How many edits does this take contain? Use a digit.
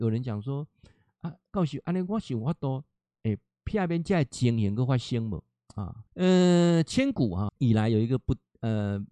2